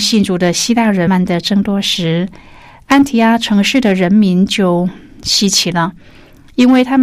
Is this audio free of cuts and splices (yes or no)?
no